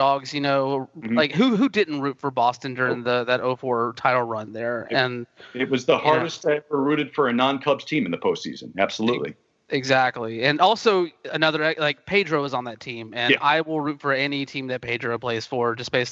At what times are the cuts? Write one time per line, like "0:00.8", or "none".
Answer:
none